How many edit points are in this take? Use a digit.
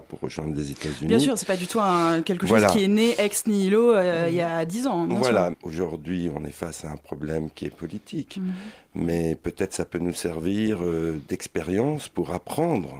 1